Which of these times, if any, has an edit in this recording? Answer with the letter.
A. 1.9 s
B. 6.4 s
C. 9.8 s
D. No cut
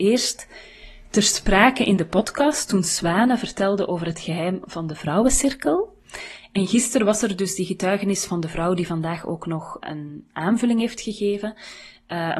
C